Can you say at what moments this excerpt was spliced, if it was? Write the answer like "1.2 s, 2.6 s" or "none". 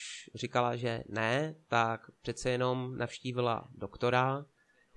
none